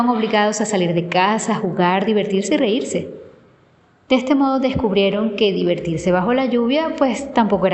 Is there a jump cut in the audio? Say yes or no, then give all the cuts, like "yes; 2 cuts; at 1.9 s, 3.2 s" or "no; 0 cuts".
no; 0 cuts